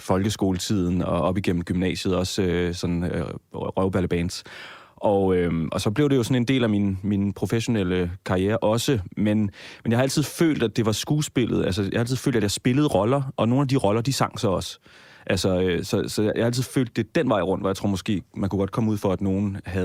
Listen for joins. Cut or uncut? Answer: uncut